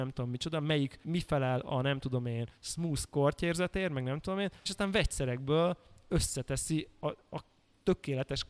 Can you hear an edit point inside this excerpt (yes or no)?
yes